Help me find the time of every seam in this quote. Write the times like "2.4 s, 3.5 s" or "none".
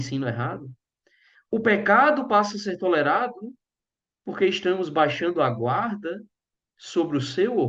none